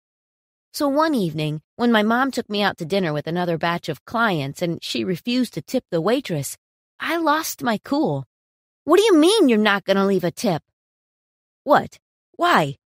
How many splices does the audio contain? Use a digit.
0